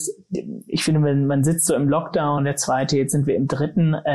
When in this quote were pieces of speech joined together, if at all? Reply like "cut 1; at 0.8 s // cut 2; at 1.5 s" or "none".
cut 1; at 2.4 s